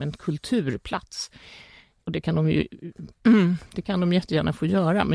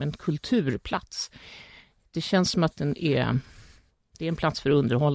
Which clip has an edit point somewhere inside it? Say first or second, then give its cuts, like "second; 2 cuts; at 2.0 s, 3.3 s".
first; 1 cut; at 2.0 s